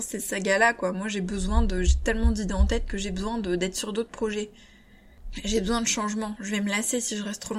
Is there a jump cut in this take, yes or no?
no